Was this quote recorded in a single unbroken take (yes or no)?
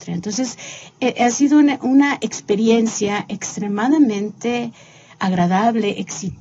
yes